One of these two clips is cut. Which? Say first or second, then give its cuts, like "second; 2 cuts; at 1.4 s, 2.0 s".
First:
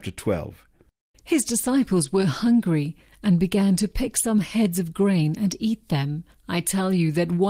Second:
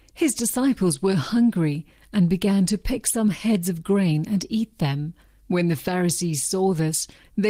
first; 2 cuts; at 1.1 s, 6.3 s